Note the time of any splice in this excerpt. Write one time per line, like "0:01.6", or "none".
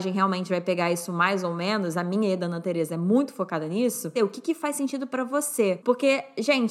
0:04.2
0:05.8